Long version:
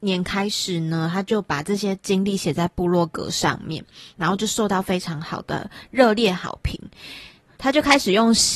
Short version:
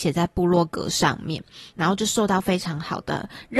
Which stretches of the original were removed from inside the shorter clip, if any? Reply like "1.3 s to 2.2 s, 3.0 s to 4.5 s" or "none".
none